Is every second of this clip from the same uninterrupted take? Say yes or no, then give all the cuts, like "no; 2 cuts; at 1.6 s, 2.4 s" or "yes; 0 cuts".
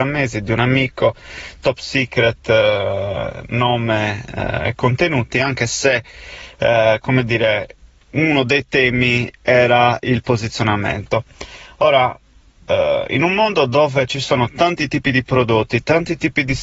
yes; 0 cuts